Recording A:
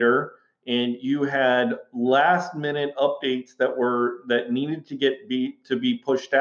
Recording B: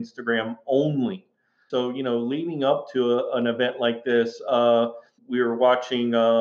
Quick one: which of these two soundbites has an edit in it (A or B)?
B